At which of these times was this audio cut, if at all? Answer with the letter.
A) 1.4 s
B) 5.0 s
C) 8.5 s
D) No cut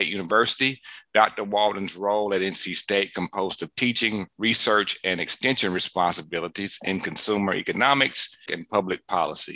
C